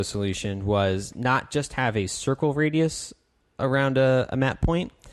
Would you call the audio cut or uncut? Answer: uncut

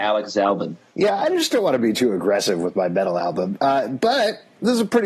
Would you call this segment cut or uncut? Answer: uncut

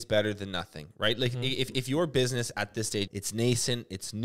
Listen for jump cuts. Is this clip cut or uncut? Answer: cut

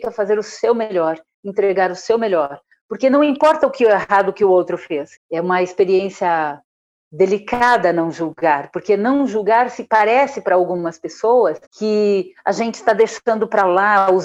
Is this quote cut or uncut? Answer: cut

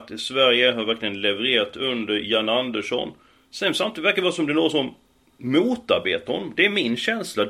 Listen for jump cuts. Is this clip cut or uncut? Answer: uncut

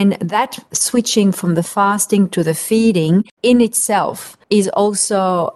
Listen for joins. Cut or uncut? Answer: uncut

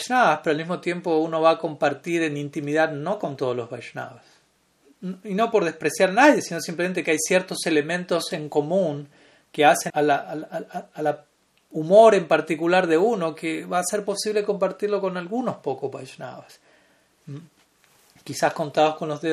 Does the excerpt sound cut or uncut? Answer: cut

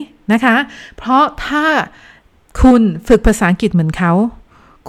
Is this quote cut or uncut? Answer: uncut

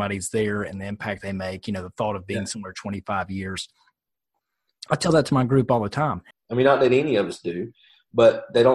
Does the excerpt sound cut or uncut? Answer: cut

